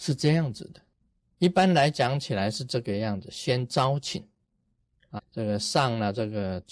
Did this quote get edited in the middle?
yes; 2 cuts; at 1.3 s, 5.2 s

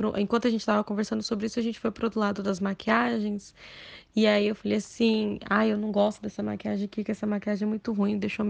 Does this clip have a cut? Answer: no; 0 cuts

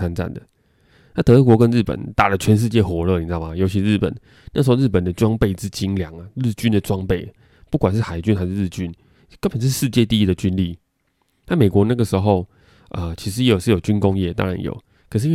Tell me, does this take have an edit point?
no; 0 cuts

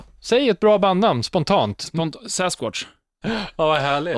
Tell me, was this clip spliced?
yes; 1 cut; at 3.2 s

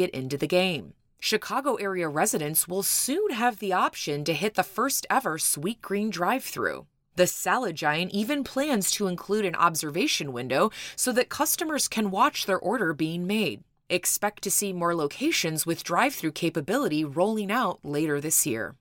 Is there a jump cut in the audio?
no; 0 cuts

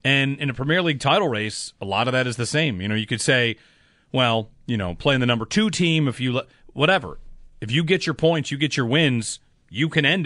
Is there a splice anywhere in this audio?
no; 0 cuts

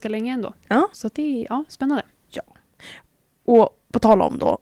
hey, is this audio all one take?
no; 1 cut; at 0.9 s

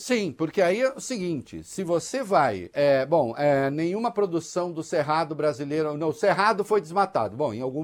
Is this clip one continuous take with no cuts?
yes; 0 cuts

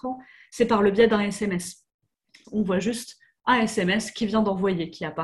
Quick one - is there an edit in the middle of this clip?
yes; 1 cut; at 2.4 s

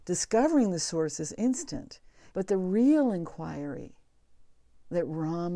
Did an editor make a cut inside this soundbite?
yes; 1 cut; at 2.3 s

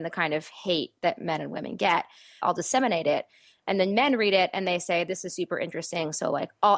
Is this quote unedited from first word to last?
no; 1 cut; at 2.4 s

